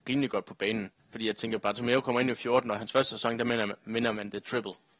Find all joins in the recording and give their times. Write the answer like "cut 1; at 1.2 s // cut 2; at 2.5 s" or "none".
cut 1; at 1.0 s